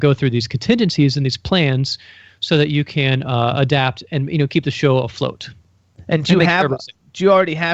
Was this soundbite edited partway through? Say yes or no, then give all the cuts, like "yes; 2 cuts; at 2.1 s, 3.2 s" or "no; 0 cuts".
no; 0 cuts